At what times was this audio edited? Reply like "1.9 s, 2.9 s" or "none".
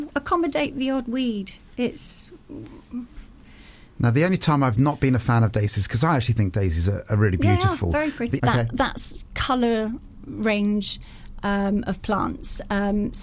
8.4 s